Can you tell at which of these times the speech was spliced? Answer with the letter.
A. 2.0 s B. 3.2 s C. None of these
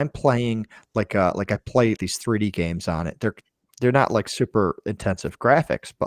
A